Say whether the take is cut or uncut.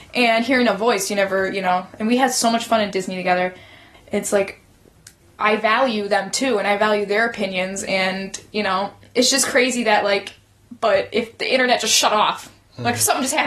cut